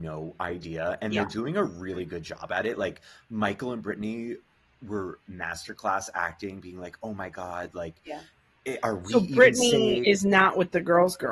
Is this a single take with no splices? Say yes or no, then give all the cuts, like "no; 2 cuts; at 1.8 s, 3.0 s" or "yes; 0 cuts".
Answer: yes; 0 cuts